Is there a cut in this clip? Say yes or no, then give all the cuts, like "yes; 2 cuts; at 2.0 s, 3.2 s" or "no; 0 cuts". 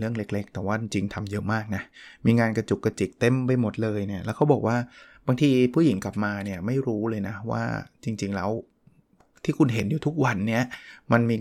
no; 0 cuts